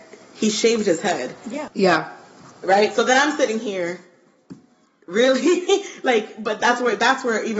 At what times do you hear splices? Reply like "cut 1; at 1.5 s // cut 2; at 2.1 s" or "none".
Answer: cut 1; at 1.7 s